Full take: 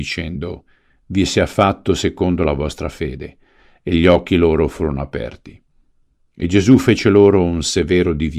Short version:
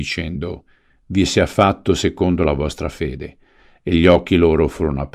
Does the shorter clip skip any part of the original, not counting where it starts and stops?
no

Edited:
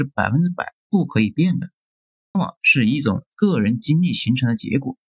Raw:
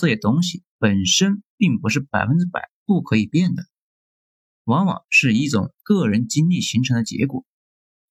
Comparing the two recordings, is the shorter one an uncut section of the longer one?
no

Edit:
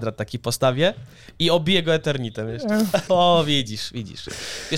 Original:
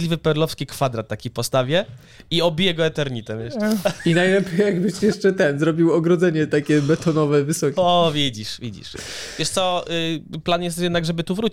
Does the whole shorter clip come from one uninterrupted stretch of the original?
no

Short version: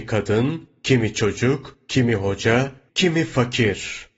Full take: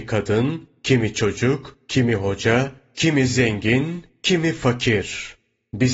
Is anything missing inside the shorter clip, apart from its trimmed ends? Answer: yes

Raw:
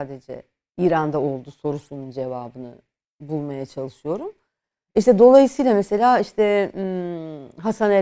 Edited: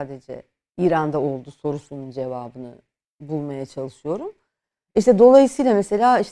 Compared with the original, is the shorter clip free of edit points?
yes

